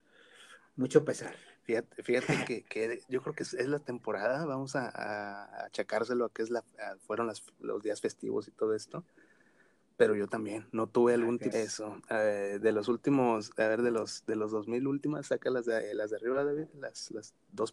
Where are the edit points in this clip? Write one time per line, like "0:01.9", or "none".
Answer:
0:11.5

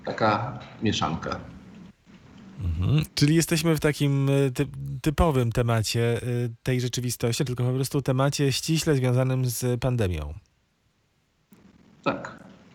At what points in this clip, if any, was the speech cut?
0:03.1
0:07.5

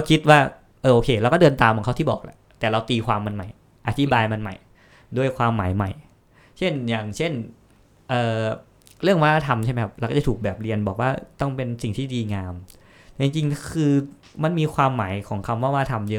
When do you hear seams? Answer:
none

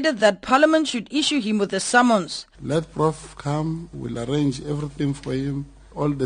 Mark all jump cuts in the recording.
0:02.5
0:03.9

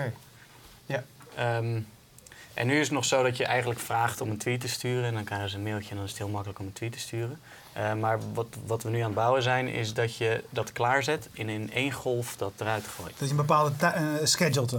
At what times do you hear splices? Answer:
none

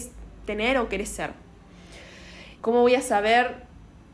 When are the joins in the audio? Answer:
0:02.6

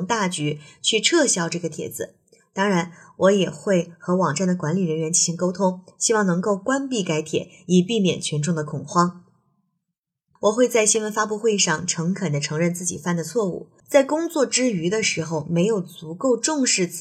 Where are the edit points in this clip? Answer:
0:10.4
0:13.8

